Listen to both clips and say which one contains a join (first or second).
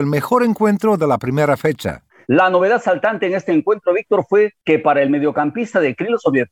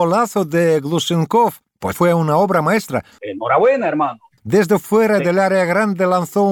second